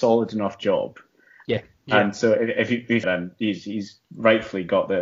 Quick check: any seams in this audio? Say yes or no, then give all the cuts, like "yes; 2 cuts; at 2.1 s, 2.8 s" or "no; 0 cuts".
yes; 2 cuts; at 1.5 s, 3.0 s